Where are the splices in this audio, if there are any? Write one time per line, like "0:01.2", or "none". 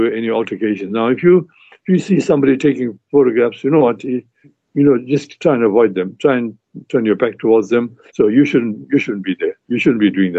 0:04.4
0:08.1